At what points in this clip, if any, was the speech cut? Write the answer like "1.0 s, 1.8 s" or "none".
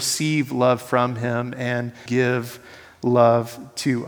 2.1 s